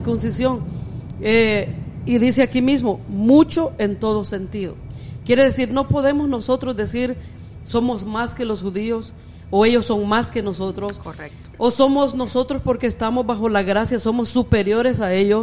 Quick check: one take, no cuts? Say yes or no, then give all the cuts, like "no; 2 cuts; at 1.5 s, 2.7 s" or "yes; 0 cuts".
yes; 0 cuts